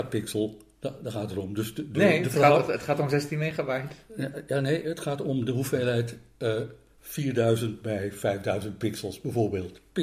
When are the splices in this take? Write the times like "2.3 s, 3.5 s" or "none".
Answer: none